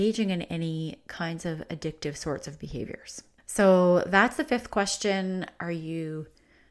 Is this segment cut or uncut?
cut